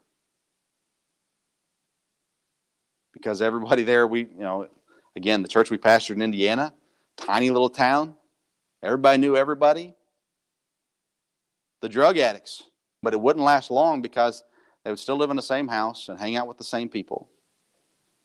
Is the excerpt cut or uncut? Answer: cut